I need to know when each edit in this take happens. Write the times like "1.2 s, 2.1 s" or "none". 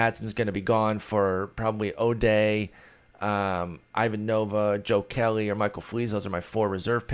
none